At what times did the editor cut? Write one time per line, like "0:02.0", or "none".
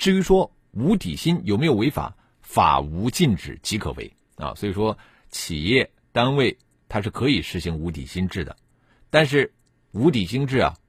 0:02.3